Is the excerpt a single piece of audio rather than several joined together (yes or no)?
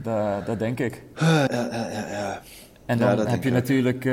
no